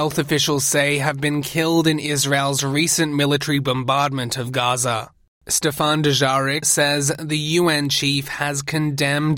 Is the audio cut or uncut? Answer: cut